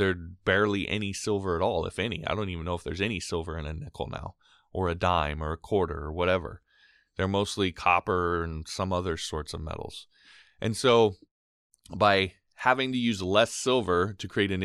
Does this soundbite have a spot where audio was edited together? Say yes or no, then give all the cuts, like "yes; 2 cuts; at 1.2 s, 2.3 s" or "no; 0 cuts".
no; 0 cuts